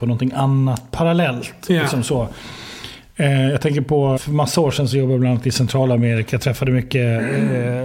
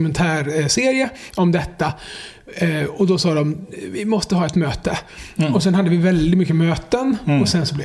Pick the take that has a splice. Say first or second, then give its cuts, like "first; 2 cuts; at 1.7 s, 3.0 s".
first; 1 cut; at 4.2 s